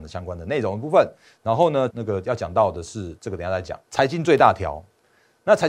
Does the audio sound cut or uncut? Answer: cut